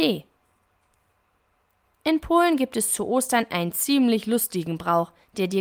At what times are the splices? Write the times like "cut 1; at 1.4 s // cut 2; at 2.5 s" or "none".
none